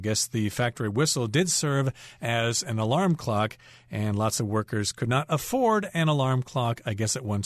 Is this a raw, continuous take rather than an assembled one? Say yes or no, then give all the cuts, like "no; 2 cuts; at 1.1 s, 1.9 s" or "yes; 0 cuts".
yes; 0 cuts